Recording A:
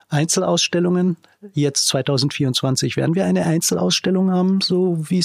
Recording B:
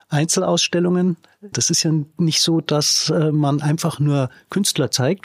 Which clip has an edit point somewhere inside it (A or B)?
B